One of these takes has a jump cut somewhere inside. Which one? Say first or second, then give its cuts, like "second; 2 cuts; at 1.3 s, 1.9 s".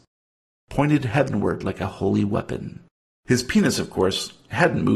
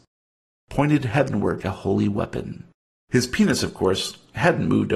second; 1 cut; at 1.6 s